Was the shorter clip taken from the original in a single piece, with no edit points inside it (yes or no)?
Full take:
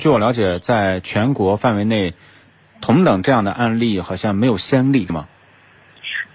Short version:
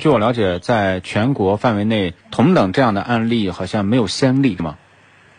no